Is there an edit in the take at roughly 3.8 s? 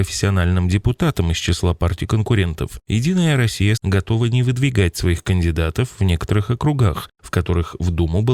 yes; 1 cut; at 3.8 s

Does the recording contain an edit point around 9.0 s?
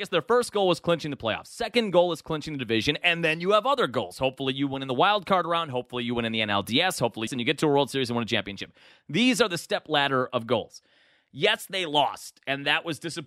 no; 1 cut; at 7.3 s

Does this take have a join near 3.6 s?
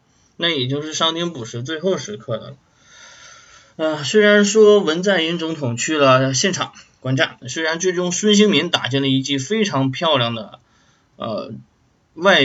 no; 1 cut; at 7.4 s

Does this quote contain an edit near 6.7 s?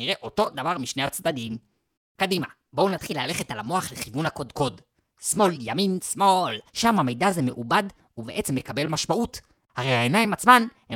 yes; 2 cuts; at 2.0 s, 6.7 s

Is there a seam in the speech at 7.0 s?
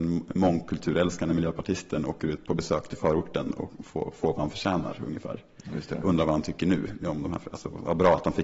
no; 0 cuts

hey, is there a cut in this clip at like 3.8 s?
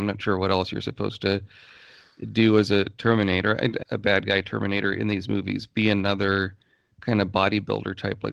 yes; 1 cut; at 3.8 s

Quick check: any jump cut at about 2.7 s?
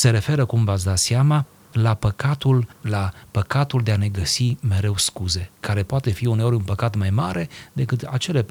yes; 1 cut; at 2.7 s

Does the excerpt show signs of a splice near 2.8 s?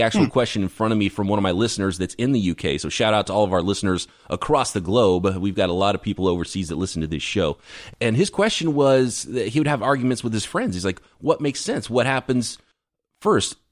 no; 0 cuts

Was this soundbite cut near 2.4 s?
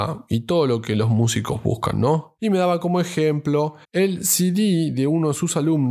yes; 2 cuts; at 2.4 s, 3.8 s

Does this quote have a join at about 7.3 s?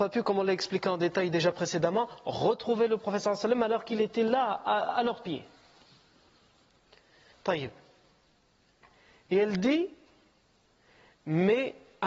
yes; 1 cut; at 7.3 s

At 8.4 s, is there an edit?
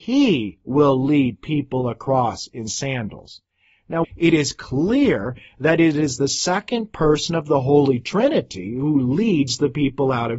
no; 1 cut; at 4.0 s

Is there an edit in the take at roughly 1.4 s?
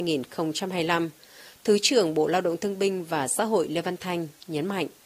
no; 0 cuts

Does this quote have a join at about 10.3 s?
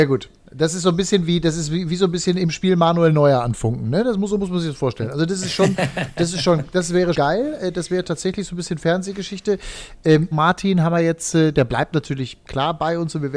yes; 2 cuts; at 7.1 s, 10.3 s

